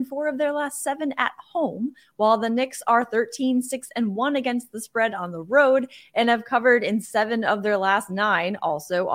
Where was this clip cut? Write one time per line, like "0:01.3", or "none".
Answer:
none